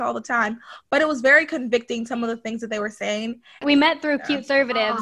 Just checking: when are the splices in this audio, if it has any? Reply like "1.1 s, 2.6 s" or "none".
3.6 s